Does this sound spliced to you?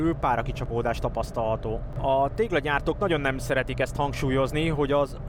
yes; 1 cut; at 1.9 s

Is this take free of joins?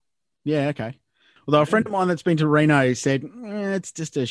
no; 1 cut; at 1.4 s

